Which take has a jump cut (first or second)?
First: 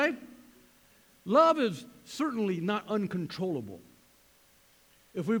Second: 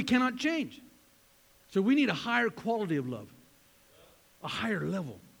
second